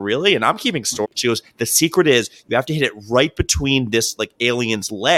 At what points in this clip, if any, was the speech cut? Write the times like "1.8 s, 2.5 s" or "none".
1.0 s